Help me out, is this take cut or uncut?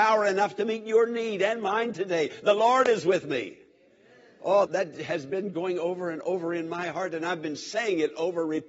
cut